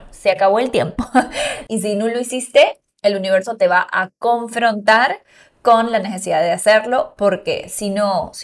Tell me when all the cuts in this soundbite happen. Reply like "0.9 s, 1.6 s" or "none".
1.7 s